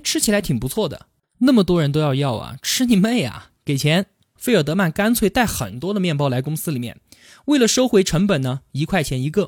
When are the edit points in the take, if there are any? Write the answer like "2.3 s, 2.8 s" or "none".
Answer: 1.2 s